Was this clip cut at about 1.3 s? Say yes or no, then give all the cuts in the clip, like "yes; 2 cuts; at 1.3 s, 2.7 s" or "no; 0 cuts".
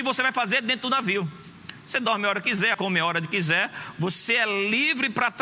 no; 1 cut; at 2.7 s